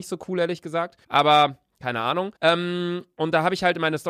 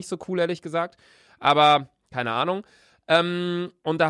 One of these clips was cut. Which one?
first; 2 cuts; at 1.0 s, 2.4 s

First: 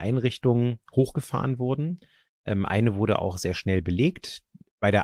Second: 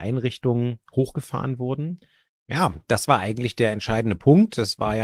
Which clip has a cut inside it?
second; 1 cut; at 2.3 s

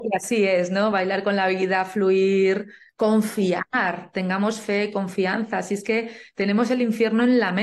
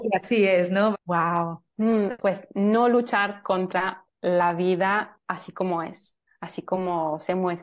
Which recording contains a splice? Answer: second; 2 cuts; at 0.9 s, 2.2 s

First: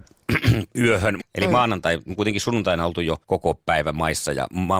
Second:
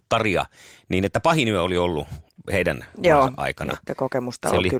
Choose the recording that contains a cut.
first; 2 cuts; at 1.2 s, 3.2 s

